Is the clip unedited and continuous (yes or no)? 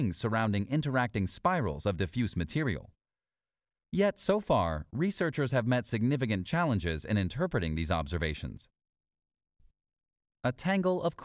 yes